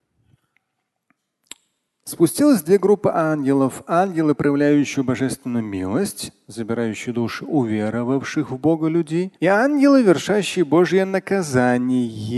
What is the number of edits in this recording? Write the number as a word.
one